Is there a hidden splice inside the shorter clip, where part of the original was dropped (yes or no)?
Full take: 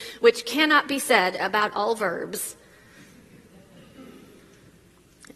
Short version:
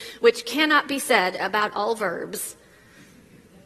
no